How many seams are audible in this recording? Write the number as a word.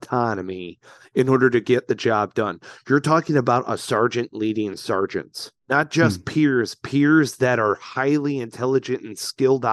one